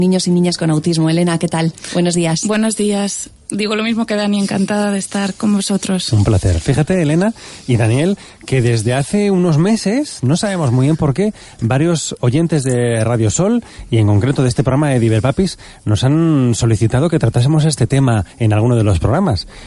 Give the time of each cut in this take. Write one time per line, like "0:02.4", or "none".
none

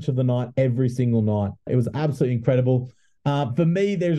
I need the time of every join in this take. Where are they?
0:01.7

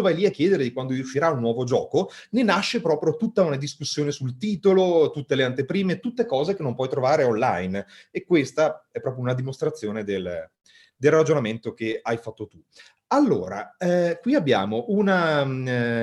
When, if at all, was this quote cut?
none

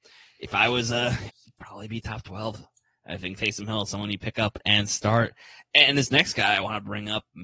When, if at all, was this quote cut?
0:01.3

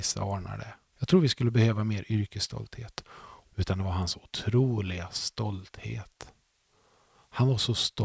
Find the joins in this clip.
0:00.9
0:03.5

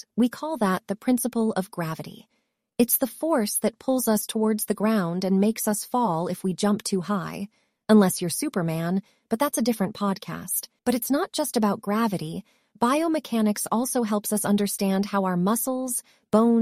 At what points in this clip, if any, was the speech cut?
0:10.8

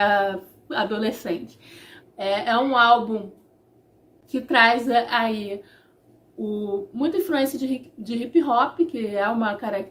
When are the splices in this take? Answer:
0:02.0

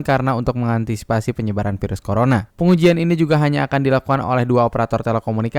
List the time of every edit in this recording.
0:02.5

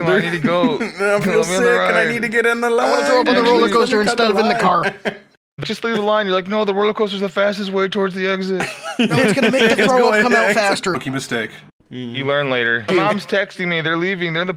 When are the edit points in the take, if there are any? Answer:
0:05.6
0:10.9
0:12.9

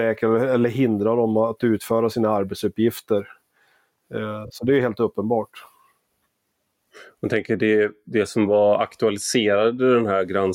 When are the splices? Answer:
none

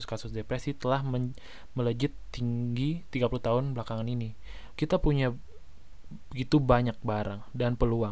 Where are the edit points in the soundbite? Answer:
0:04.7

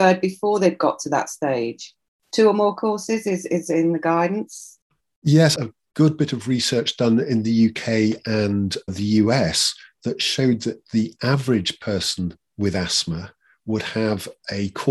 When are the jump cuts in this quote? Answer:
0:02.2
0:05.5
0:08.9

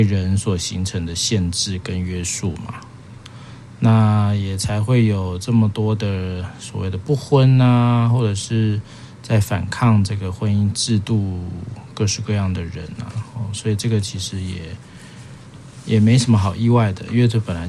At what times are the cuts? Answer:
none

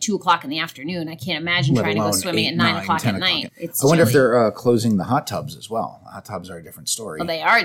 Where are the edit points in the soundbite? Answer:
0:03.5

